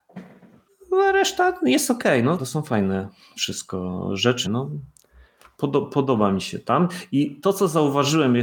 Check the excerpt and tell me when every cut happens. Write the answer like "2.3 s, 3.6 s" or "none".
2.4 s, 4.4 s